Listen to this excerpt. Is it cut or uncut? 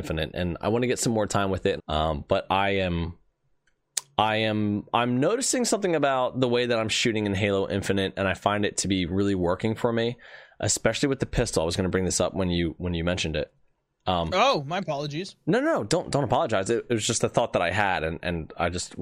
cut